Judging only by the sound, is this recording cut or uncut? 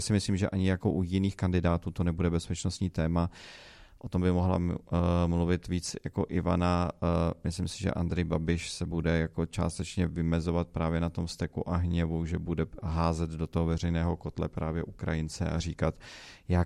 uncut